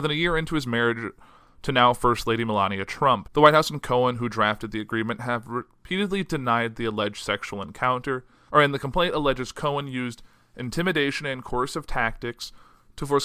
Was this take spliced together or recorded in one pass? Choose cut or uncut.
cut